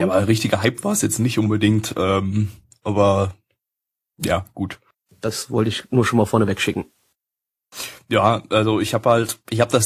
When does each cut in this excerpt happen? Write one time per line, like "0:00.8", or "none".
0:05.1